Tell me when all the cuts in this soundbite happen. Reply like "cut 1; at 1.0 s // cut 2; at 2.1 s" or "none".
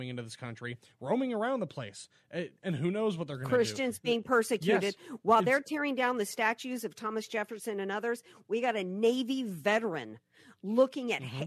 none